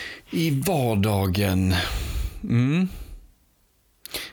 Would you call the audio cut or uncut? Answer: uncut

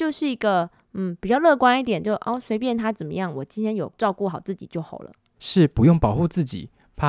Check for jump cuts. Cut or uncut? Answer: cut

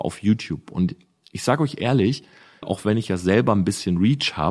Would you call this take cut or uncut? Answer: cut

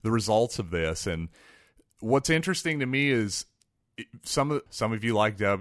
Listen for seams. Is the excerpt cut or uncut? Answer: cut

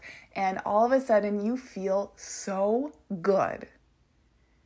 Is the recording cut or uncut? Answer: uncut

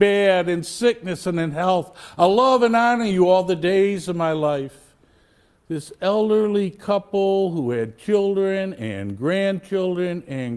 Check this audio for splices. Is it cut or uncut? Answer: uncut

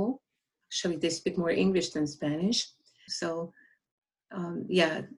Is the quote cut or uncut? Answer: cut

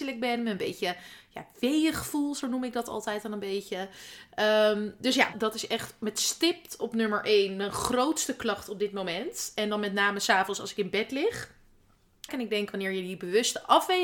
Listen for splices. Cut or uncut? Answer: cut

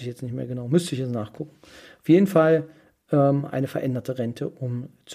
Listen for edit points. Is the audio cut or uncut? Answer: uncut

